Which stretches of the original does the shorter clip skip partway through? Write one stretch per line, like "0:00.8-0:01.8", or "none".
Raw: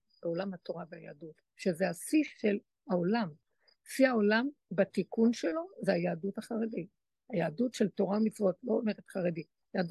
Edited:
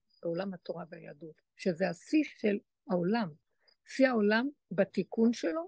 none